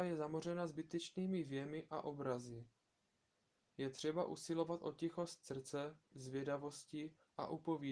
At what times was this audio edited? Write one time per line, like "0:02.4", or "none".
0:03.6
0:06.1